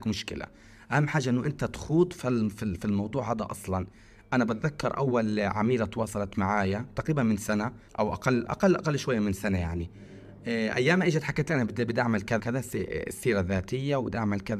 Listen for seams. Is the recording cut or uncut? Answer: cut